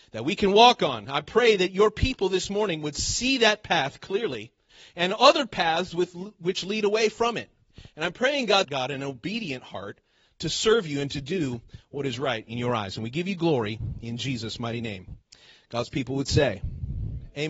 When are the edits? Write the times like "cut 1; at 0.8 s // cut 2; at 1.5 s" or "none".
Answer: cut 1; at 8.6 s